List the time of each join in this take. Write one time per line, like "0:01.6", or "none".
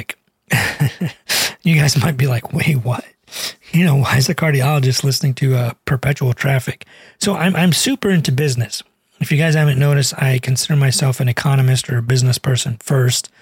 none